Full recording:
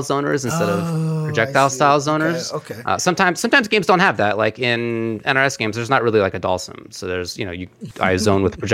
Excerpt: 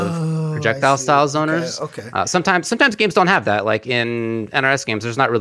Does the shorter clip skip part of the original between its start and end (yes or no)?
no